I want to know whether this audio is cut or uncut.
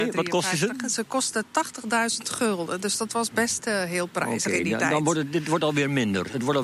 uncut